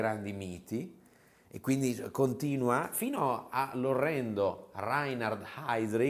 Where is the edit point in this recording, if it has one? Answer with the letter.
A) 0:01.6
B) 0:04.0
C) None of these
C